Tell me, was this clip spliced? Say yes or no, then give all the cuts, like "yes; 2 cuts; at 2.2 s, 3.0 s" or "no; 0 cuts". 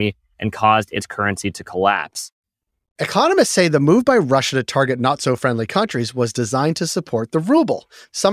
no; 0 cuts